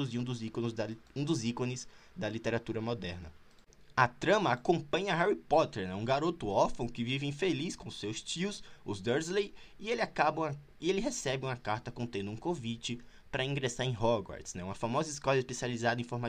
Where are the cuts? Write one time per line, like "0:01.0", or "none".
none